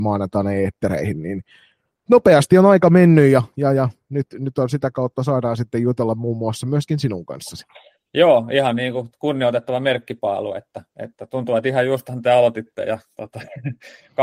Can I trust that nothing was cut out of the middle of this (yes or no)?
yes